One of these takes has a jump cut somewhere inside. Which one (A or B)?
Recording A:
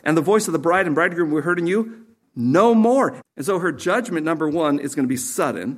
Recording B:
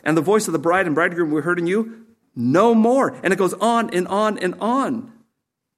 A